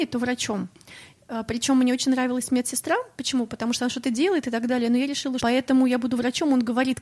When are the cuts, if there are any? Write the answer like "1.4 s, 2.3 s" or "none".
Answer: 5.4 s